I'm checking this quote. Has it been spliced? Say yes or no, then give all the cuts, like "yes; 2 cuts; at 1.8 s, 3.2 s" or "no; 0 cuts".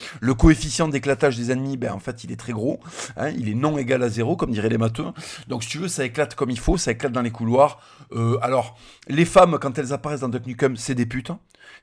no; 0 cuts